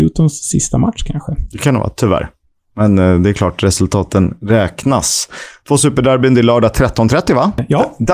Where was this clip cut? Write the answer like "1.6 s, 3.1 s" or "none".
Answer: none